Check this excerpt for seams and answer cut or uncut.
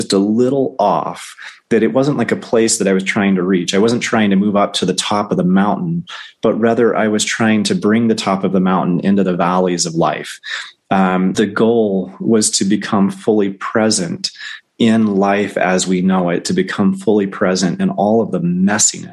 cut